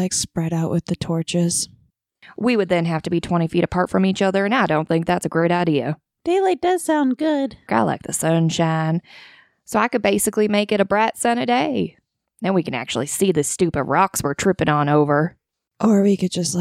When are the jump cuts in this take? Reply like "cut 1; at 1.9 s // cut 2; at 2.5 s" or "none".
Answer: cut 1; at 7.7 s